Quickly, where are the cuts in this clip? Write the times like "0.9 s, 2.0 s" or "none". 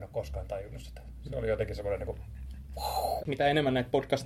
none